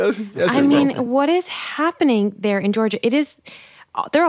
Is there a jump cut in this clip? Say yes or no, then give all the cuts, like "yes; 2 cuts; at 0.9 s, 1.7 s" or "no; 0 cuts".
no; 0 cuts